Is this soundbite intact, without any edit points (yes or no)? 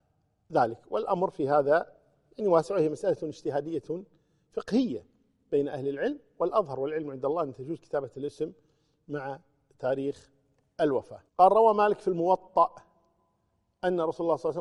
no